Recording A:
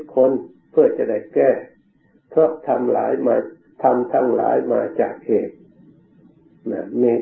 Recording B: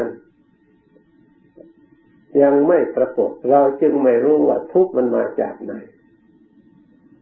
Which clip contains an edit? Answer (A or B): B